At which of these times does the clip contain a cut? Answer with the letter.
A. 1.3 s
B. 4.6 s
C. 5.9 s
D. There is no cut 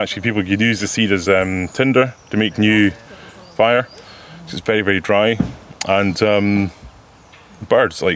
D